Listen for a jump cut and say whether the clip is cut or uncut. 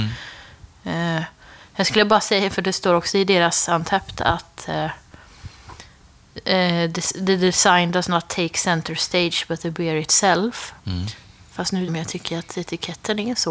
cut